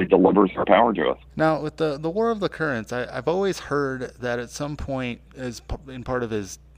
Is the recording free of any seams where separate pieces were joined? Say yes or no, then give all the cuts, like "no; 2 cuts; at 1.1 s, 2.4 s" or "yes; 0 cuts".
no; 2 cuts; at 1.3 s, 5.2 s